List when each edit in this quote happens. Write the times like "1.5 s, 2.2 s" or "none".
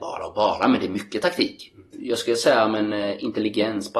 1.9 s